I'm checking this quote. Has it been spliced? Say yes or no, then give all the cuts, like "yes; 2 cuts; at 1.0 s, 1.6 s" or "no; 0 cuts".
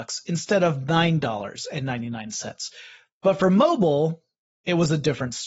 no; 0 cuts